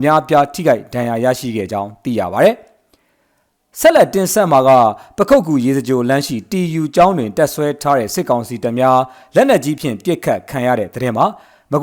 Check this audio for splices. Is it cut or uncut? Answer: uncut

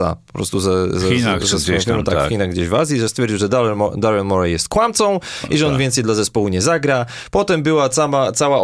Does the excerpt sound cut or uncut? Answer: uncut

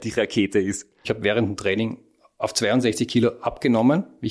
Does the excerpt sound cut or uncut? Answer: cut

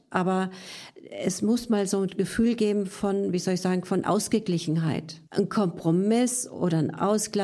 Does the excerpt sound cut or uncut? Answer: cut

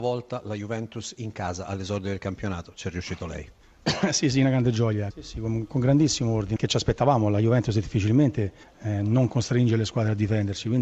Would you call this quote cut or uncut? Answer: cut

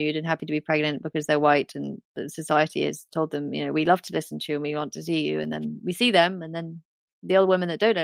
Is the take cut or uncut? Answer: uncut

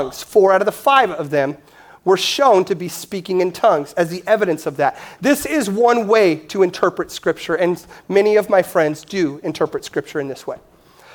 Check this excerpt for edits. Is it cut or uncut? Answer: uncut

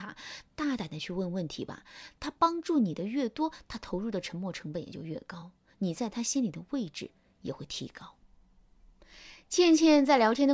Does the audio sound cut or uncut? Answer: uncut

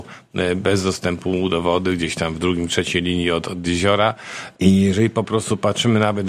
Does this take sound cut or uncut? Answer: cut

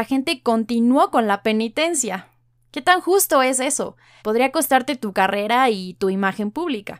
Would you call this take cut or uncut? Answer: cut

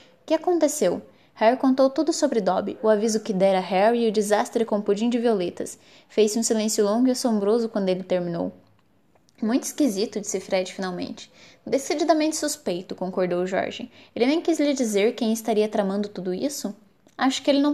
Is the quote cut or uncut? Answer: uncut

